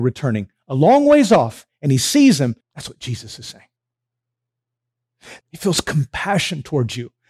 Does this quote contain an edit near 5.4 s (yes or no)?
yes